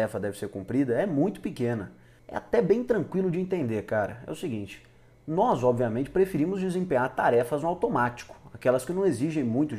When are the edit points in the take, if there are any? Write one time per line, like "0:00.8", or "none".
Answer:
0:02.2